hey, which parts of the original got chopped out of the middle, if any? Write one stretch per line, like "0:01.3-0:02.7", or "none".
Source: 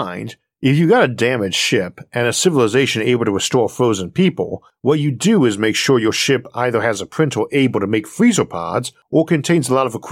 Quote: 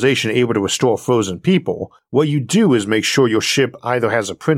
none